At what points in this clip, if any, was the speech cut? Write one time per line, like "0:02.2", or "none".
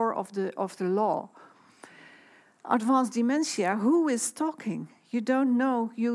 none